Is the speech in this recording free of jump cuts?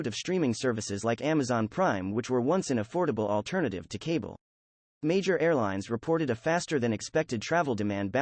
yes; 0 cuts

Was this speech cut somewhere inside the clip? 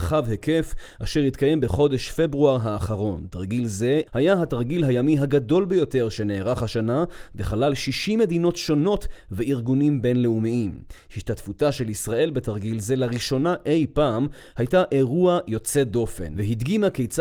yes; 1 cut; at 4.1 s

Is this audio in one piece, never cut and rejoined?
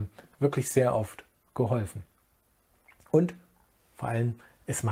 yes; 0 cuts

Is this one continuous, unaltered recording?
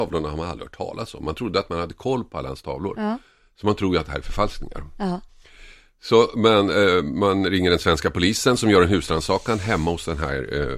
yes; 0 cuts

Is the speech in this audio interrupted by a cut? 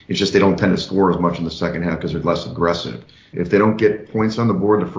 yes; 1 cut; at 3.3 s

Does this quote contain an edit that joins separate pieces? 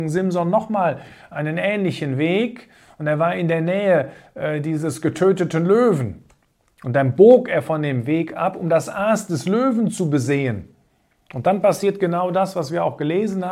no; 0 cuts

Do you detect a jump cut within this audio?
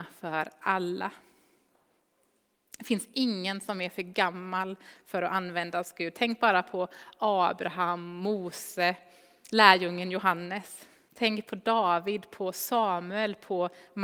yes; 1 cut; at 11.1 s

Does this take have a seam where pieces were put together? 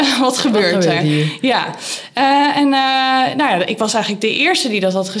no; 0 cuts

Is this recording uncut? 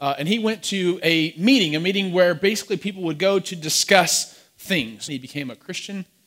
no; 1 cut; at 5.1 s

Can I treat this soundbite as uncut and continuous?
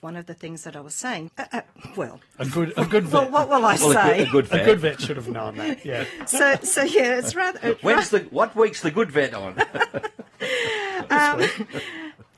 no; 1 cut; at 1.3 s

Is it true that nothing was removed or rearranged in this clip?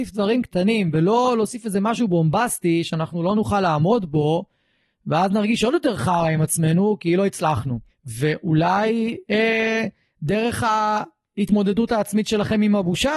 no; 1 cut; at 7.9 s

